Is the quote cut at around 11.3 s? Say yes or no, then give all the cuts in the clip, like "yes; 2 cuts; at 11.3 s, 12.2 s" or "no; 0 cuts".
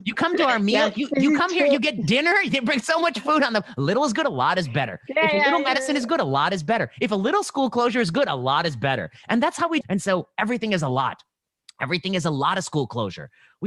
no; 1 cut; at 9.8 s